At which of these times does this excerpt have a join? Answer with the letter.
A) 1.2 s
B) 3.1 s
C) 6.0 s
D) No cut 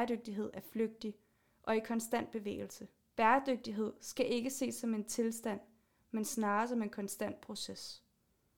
B